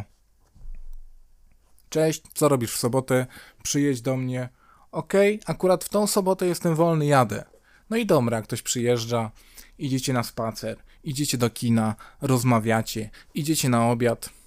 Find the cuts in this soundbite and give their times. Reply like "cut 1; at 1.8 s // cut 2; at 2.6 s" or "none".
none